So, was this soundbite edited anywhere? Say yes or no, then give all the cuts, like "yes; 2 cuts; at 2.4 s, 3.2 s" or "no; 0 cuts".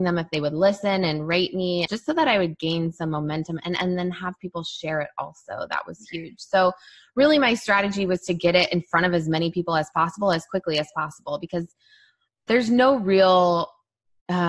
yes; 1 cut; at 1.9 s